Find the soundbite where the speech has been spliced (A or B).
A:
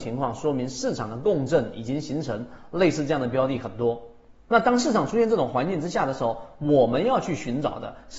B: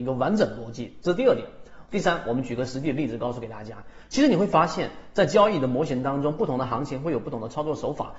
A